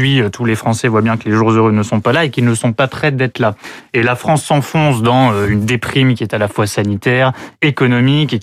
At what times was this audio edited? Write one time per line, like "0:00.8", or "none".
none